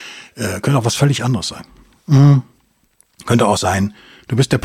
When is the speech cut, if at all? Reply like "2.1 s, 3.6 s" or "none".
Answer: none